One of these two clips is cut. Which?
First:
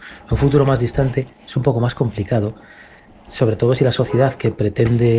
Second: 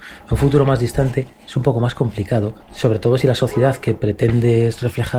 second; 1 cut; at 2.6 s

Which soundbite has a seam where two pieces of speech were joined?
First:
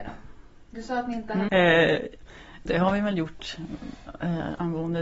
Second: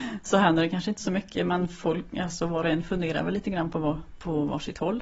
first; 2 cuts; at 1.5 s, 2.7 s

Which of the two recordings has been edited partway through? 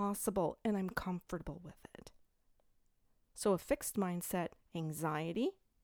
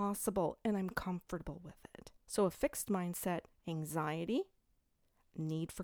second; 1 cut; at 2.2 s

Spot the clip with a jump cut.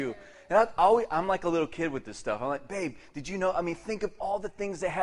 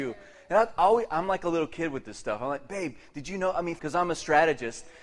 second; 1 cut; at 3.8 s

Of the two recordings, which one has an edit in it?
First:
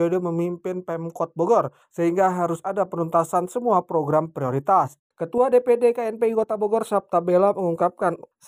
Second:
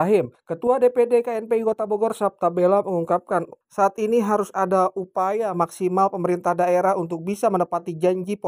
first; 1 cut; at 5.1 s

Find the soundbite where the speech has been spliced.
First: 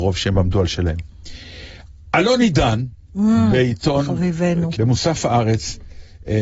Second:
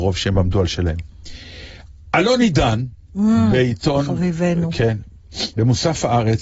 first; 1 cut; at 4.7 s

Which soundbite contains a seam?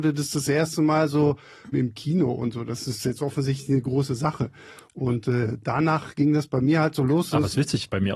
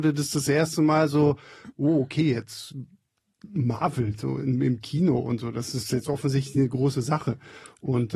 first; 1 cut; at 1.7 s

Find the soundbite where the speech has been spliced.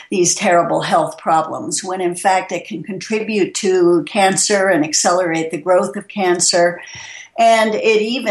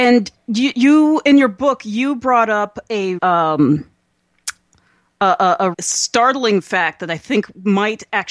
second; 2 cuts; at 3.2 s, 5.7 s

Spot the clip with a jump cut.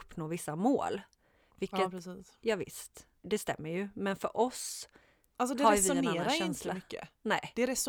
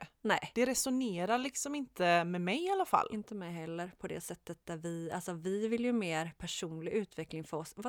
first; 1 cut; at 3.2 s

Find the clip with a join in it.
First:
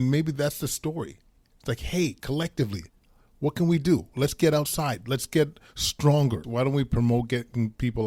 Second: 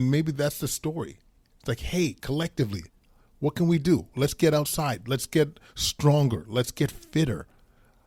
first; 1 cut; at 6.4 s

